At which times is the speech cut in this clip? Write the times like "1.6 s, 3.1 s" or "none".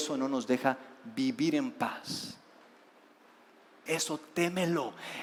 3.9 s

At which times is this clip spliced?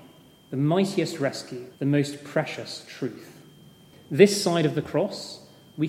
1.8 s, 3.9 s

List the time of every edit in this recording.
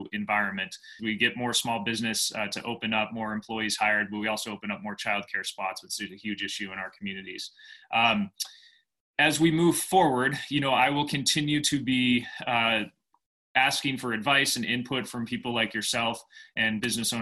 1.0 s

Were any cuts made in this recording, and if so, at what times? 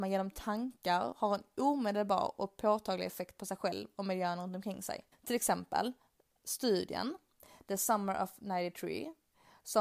5.1 s

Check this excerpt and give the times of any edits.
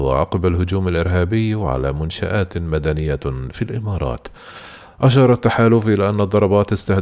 none

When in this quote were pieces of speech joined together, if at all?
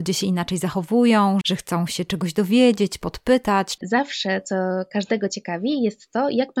1.4 s, 3.8 s

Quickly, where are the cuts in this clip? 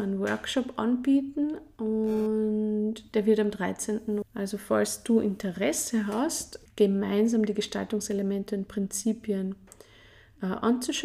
4.2 s, 6.7 s

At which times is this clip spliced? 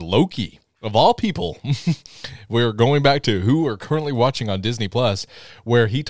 none

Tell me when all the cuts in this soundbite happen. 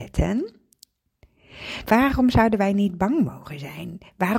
1.9 s

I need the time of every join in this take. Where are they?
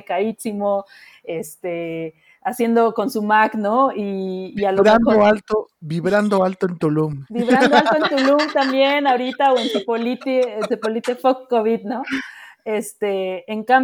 none

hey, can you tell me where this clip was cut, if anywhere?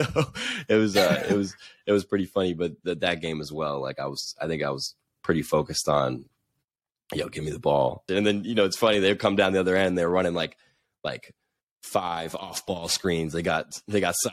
8.1 s

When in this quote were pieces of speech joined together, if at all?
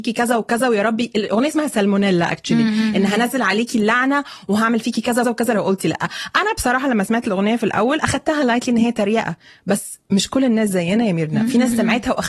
5.2 s

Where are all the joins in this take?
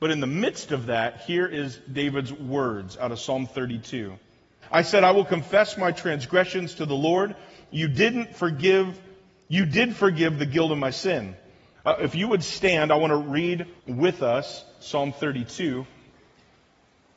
4.6 s, 11.7 s, 13.8 s

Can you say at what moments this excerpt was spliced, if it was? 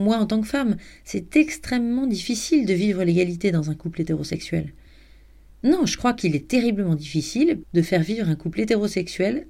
5.5 s, 7.6 s

